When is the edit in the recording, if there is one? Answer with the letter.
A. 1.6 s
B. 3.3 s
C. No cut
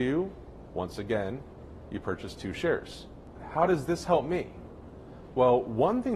B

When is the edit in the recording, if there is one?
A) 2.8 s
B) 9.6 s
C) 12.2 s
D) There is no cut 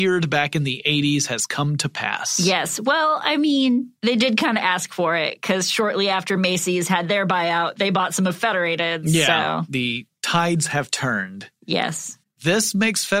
C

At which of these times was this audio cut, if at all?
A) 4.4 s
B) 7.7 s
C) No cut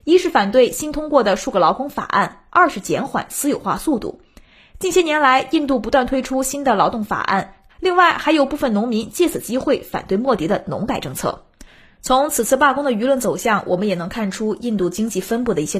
B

